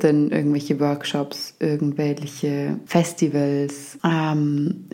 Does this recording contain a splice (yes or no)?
yes